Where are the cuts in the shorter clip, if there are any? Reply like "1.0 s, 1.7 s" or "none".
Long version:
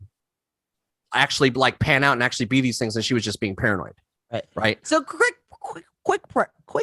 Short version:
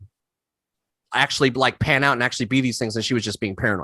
none

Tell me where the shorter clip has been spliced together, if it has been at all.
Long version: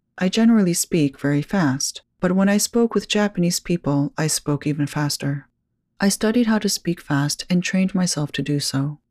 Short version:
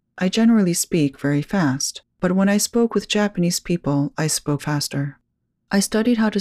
4.6 s

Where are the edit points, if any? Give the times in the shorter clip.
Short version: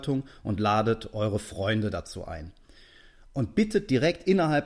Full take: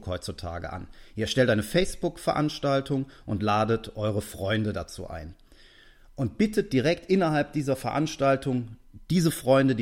none

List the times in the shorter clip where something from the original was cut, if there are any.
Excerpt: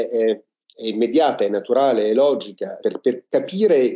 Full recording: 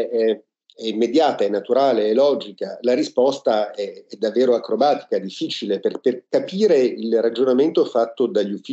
2.8 s

